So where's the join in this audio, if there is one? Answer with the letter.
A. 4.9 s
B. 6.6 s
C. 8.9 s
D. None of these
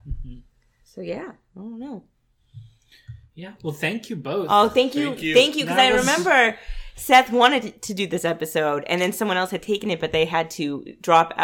D